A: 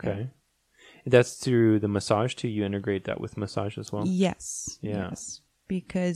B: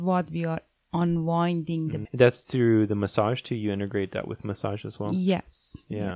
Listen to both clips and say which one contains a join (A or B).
B